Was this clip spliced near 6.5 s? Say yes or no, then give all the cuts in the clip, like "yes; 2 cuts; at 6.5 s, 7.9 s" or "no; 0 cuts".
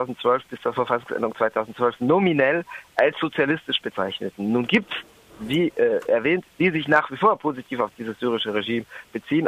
yes; 1 cut; at 6.5 s